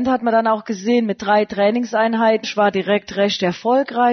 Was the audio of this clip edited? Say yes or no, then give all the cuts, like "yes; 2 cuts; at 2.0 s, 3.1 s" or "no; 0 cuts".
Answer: yes; 1 cut; at 2.4 s